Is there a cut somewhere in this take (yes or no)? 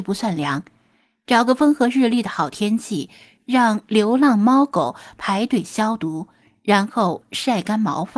no